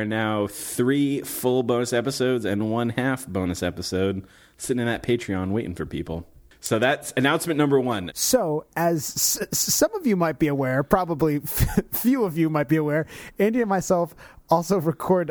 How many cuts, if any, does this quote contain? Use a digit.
1